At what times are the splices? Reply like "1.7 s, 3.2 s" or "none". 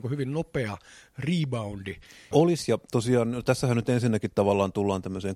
2.3 s